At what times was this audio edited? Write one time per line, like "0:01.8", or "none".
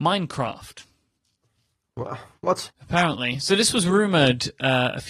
0:02.7

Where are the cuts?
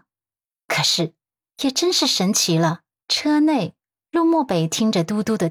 0:03.0

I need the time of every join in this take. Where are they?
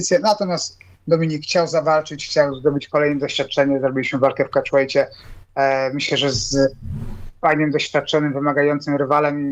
none

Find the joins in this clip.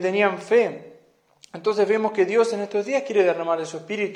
none

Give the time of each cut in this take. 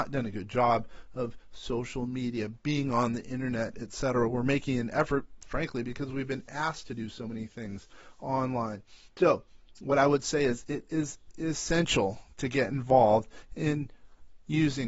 none

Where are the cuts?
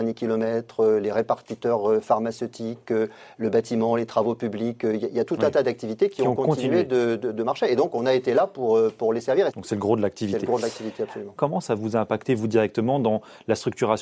0:09.5
0:11.4

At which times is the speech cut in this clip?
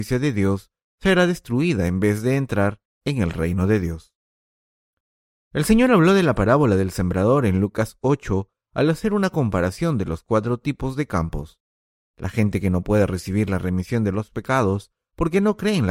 0:12.0

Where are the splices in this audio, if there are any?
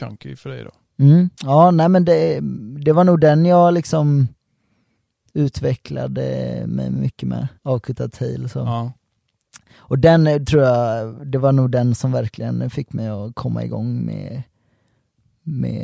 0:01.3
0:07.6

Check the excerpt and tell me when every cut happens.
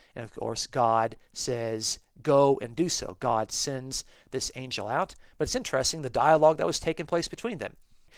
none

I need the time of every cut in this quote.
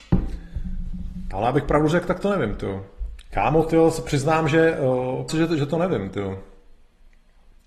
0:01.3
0:03.3
0:05.3

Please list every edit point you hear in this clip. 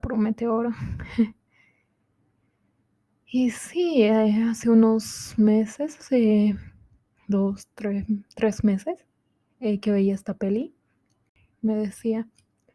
none

